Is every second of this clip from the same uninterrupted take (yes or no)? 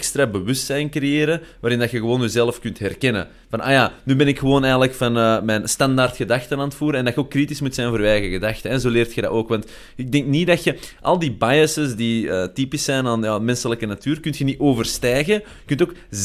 yes